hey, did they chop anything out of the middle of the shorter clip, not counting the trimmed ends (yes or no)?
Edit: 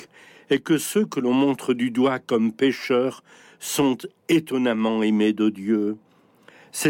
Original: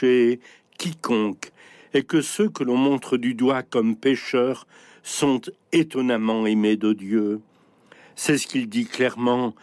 no